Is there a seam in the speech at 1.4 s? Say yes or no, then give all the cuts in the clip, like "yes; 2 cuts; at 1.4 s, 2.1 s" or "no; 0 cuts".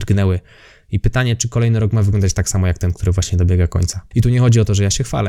no; 1 cut; at 4.1 s